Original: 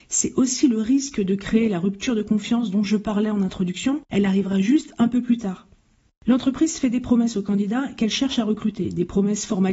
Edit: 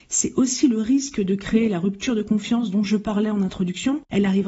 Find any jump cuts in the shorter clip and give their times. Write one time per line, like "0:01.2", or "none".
none